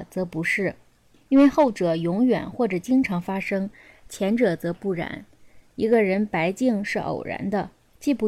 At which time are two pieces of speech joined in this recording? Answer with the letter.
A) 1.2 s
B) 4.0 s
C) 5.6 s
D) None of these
D